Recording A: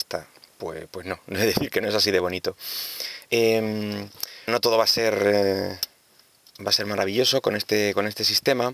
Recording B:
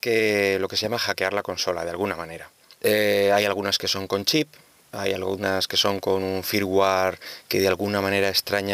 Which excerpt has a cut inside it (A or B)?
A